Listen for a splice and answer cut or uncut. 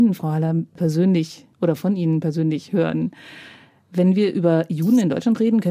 uncut